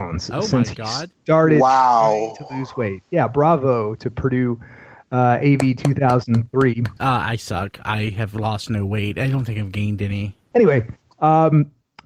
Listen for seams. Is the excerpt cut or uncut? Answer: cut